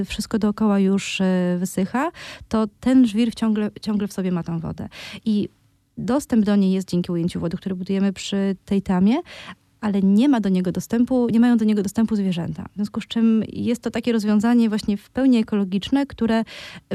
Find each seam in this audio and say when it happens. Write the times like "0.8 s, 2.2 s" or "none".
none